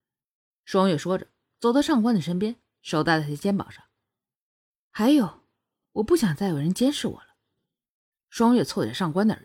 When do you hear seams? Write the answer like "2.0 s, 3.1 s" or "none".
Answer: none